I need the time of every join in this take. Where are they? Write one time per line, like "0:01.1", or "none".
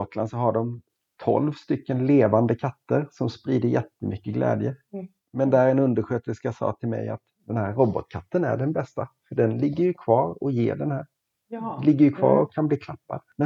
none